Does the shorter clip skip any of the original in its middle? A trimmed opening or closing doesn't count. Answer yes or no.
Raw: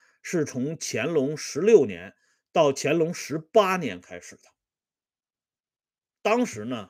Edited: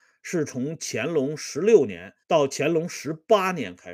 yes